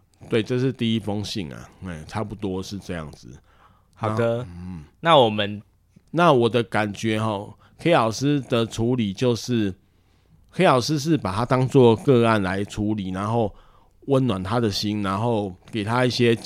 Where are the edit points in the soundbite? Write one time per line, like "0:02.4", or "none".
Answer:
0:06.0